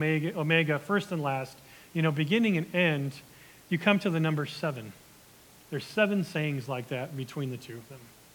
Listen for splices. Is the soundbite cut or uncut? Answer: uncut